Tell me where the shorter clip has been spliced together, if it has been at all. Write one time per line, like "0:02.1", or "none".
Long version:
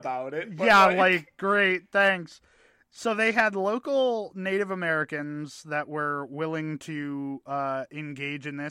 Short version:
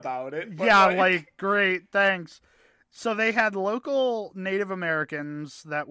none